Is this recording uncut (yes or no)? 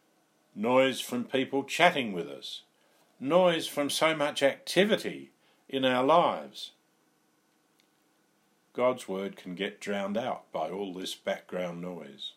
yes